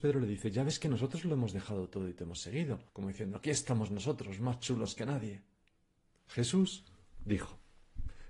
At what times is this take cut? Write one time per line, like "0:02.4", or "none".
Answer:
0:02.9